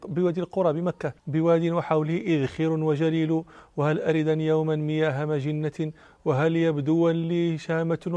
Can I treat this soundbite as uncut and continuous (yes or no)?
no